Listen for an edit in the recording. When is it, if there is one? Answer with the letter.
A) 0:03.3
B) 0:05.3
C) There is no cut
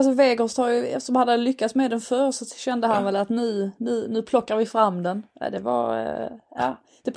C